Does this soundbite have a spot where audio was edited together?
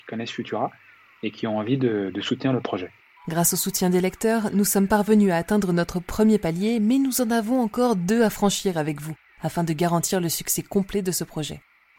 yes; 1 cut; at 3.2 s

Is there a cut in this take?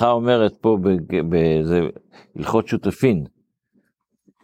no; 0 cuts

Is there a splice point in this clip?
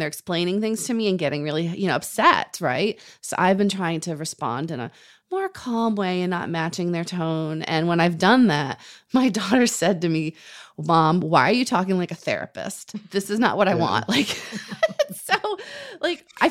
no; 0 cuts

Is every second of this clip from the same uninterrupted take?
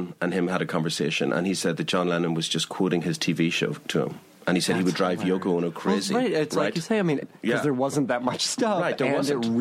no; 1 cut; at 7.2 s

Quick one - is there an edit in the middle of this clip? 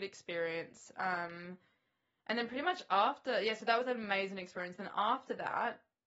no; 0 cuts

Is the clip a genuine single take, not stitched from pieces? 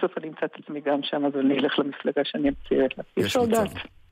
no; 1 cut; at 3.1 s

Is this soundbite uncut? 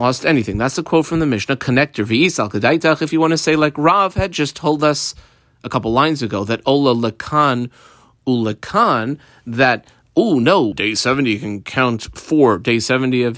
no; 1 cut; at 10.7 s

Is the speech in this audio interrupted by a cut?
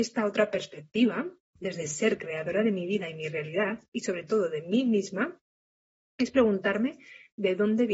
no; 0 cuts

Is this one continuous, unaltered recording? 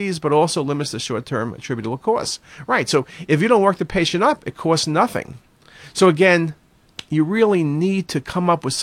yes; 0 cuts

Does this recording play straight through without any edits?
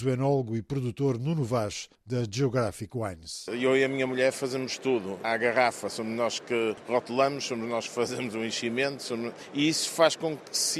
no; 1 cut; at 5.2 s

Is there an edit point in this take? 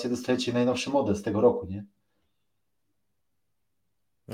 no; 0 cuts

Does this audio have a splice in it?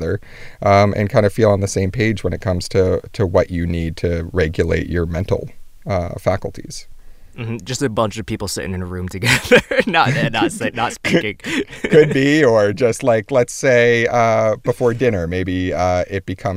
no; 0 cuts

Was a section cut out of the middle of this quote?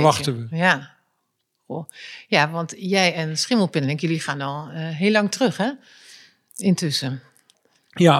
no; 0 cuts

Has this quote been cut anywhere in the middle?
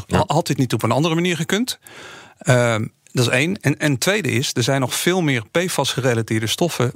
no; 0 cuts

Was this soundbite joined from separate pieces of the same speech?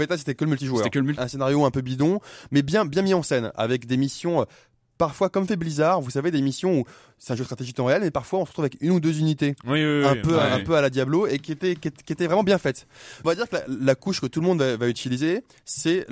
yes; 2 cuts; at 1.2 s, 13.2 s

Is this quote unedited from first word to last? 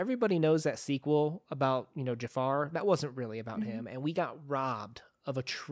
yes; 0 cuts

